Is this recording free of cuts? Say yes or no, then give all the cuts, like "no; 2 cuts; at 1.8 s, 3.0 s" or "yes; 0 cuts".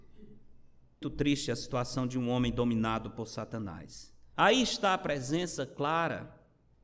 no; 2 cuts; at 1.0 s, 4.3 s